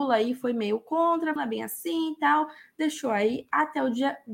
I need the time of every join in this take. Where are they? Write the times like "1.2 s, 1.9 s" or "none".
1.4 s